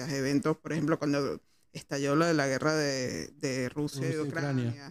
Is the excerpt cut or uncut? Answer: uncut